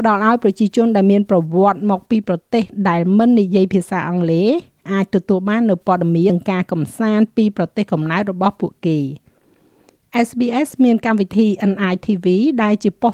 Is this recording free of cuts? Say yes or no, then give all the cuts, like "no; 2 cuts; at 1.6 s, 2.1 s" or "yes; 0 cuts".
no; 1 cut; at 6.3 s